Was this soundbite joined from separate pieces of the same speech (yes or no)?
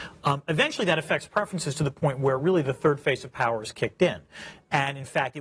no